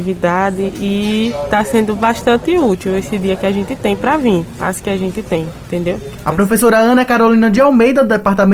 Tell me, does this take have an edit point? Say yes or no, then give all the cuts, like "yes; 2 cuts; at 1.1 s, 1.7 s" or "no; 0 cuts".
yes; 1 cut; at 6.2 s